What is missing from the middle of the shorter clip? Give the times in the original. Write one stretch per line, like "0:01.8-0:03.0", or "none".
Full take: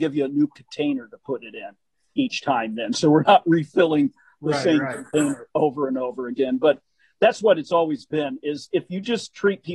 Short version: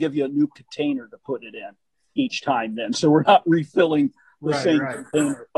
none